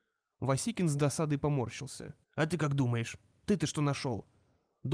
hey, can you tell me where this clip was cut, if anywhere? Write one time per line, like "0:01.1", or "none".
0:02.2